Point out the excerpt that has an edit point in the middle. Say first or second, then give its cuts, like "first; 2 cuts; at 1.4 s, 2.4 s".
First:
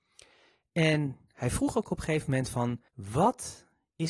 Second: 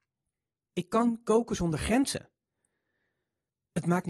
first; 1 cut; at 2.9 s